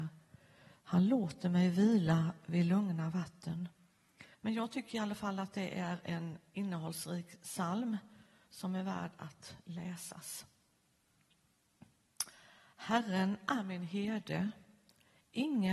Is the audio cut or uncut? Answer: cut